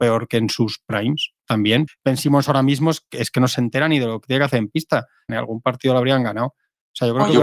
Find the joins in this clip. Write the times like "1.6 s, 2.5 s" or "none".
1.9 s, 5.3 s